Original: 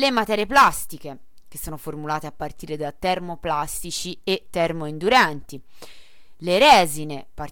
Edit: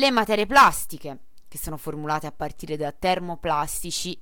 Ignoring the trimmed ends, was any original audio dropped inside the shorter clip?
no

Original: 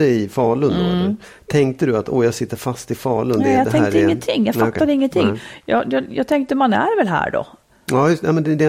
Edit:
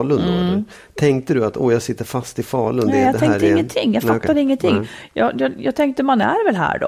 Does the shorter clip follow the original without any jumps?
yes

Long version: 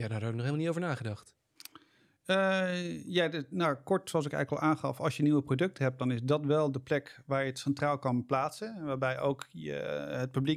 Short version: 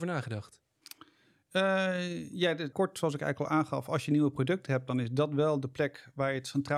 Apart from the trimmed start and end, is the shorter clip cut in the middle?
yes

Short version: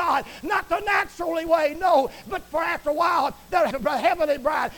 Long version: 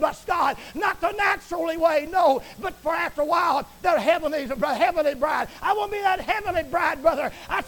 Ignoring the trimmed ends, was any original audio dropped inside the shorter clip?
yes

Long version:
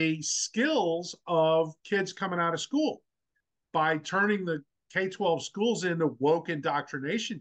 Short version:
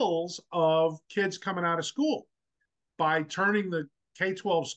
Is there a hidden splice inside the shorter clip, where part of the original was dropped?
no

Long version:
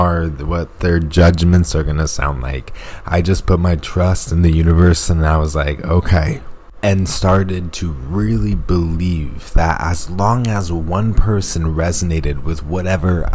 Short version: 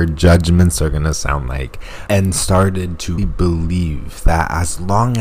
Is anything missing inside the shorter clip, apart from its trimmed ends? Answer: yes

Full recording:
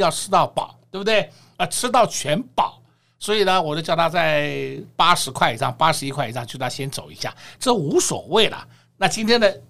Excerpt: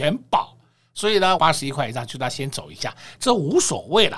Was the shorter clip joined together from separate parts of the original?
yes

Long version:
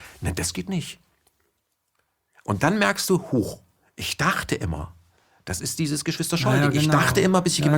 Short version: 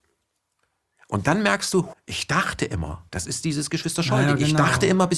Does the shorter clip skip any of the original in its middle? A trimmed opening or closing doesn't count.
yes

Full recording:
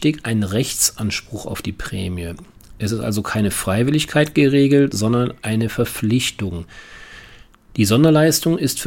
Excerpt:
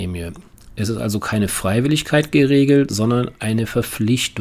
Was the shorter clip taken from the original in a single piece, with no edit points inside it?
yes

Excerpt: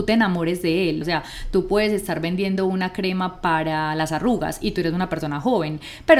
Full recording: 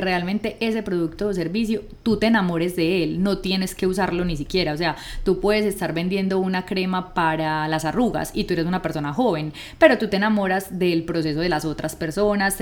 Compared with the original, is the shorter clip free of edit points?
no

